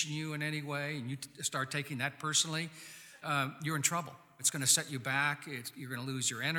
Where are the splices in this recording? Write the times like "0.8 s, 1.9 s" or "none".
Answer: 3.2 s

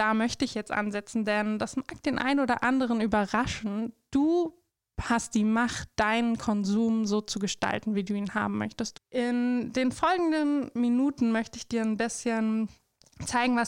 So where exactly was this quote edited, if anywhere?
8.9 s

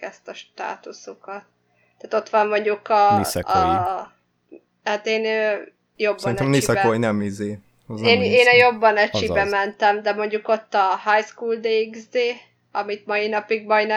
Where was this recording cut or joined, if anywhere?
none

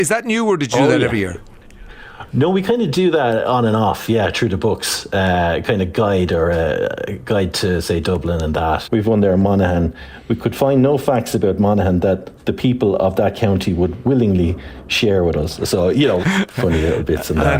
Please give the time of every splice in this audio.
8.8 s, 16.2 s

